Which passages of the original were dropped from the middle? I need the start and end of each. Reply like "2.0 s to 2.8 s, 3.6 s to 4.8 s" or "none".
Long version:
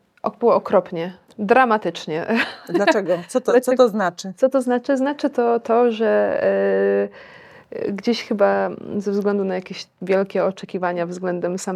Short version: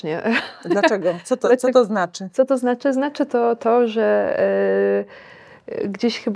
none